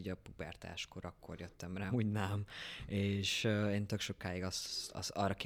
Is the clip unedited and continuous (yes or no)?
no